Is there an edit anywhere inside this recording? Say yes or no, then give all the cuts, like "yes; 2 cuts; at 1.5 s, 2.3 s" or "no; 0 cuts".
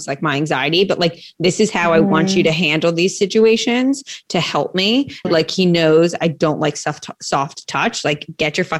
yes; 1 cut; at 5.2 s